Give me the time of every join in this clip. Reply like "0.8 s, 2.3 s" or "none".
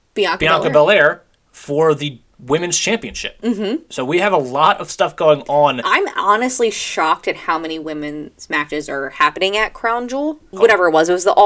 10.5 s

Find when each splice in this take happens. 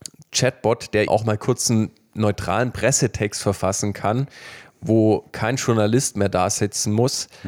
1.1 s

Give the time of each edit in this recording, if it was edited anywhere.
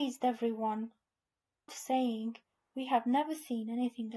1.7 s

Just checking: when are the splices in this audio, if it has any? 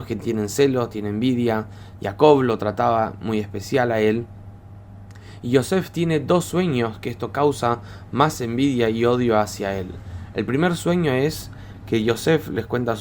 none

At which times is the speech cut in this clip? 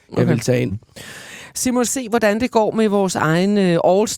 1.9 s

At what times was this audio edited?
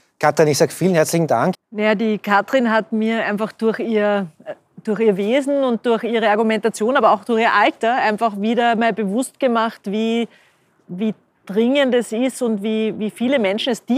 1.5 s

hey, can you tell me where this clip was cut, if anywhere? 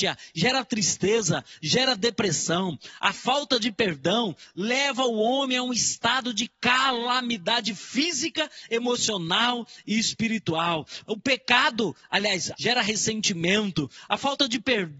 3.0 s, 11.0 s, 12.5 s

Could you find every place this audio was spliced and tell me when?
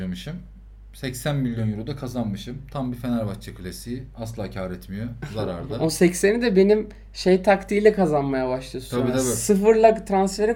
none

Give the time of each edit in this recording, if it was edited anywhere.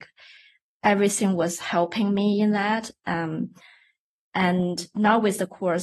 none

